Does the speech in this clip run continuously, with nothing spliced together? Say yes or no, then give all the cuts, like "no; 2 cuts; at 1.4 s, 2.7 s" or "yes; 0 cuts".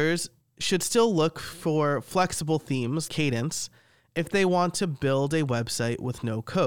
no; 1 cut; at 3.1 s